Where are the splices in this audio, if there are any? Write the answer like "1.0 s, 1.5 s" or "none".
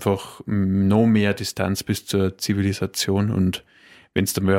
none